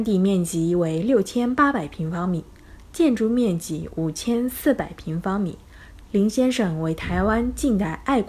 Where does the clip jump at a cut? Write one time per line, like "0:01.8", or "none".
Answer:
0:06.0